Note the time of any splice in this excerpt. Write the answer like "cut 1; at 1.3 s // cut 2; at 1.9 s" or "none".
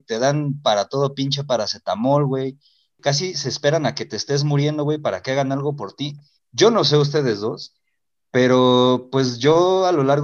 cut 1; at 6.4 s